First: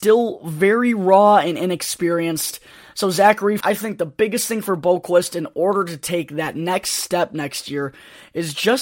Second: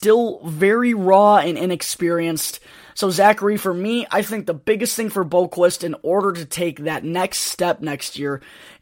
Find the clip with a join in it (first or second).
first